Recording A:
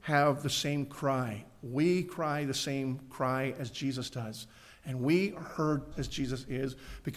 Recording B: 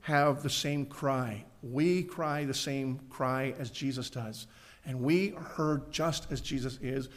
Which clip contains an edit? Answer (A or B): A